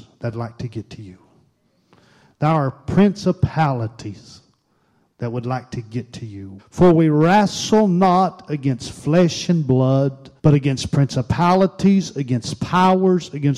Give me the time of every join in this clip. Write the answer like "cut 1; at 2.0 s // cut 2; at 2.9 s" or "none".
cut 1; at 6.6 s // cut 2; at 10.4 s